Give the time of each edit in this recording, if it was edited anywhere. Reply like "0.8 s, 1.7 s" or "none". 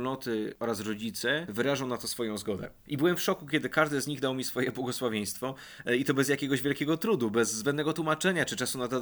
none